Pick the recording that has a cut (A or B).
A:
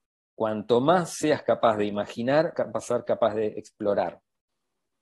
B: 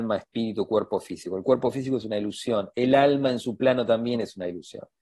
A